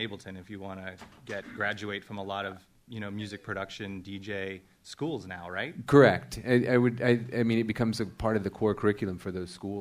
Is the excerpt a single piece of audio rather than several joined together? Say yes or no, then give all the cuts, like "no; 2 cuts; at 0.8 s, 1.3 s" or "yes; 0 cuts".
yes; 0 cuts